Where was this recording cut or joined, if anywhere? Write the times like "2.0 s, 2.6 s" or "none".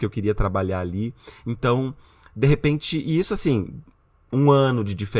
none